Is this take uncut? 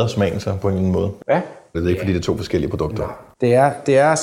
no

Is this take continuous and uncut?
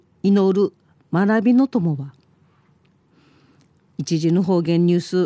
yes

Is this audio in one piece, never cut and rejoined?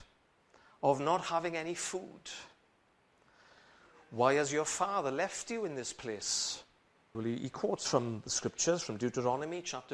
no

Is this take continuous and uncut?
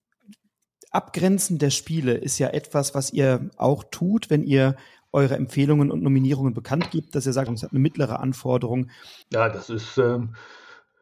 no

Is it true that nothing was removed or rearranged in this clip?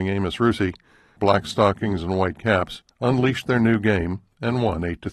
no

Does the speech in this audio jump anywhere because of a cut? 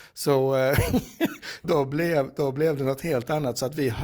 yes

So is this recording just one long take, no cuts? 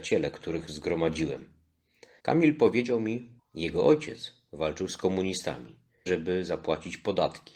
no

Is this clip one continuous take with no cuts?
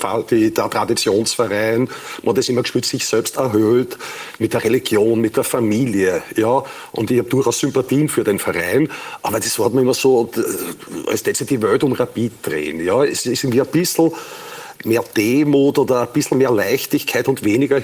yes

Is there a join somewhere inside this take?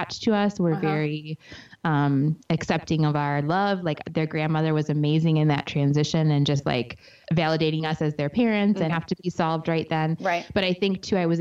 yes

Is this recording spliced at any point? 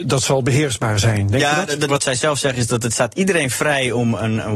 yes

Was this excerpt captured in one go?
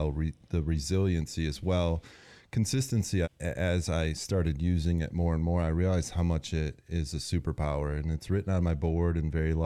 no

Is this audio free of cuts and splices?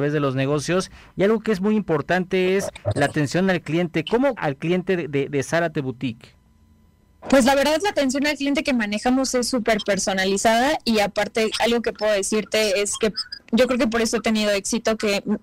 no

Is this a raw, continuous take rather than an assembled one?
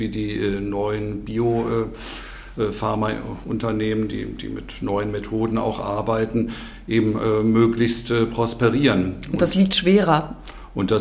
yes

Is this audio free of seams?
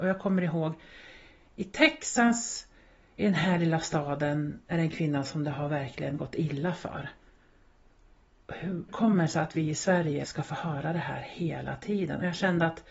no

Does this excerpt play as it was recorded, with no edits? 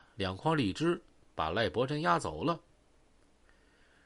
yes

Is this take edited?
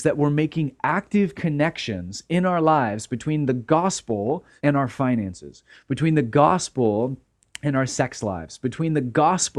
yes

